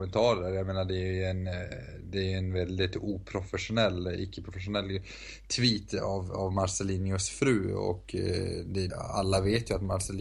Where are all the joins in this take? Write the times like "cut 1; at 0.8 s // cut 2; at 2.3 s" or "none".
cut 1; at 8.9 s